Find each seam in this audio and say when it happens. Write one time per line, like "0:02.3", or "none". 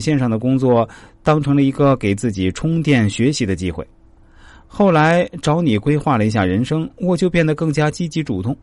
0:04.2